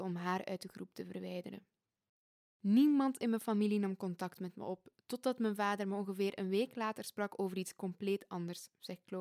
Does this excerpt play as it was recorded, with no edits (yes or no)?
yes